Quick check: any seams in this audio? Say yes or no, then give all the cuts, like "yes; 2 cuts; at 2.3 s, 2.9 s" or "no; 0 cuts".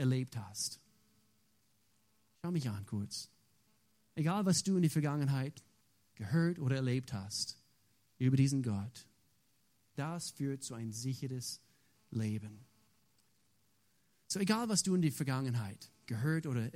yes; 1 cut; at 10.0 s